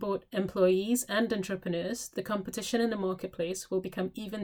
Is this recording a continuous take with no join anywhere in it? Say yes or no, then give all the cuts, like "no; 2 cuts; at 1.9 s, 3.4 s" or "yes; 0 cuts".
yes; 0 cuts